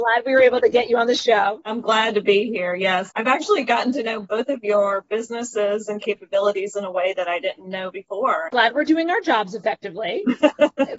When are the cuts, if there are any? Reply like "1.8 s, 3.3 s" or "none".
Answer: 8.5 s